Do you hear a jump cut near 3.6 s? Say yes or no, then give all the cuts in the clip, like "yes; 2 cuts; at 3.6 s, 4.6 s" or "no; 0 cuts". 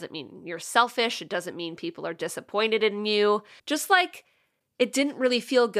yes; 1 cut; at 3.6 s